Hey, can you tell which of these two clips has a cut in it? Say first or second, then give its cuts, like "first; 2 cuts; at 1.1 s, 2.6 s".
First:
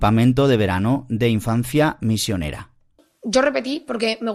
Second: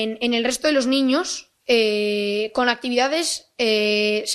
second; 1 cut; at 1.6 s